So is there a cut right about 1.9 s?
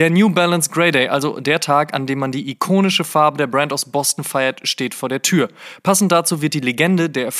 no; 0 cuts

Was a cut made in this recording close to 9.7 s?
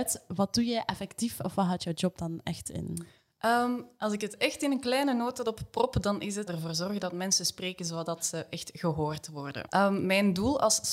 yes; 2 cuts; at 6.5 s, 9.7 s

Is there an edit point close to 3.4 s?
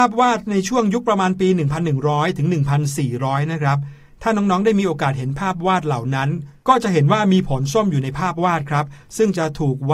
no; 0 cuts

